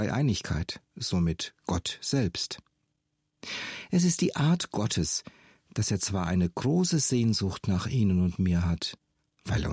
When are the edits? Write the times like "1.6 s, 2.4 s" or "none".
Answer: none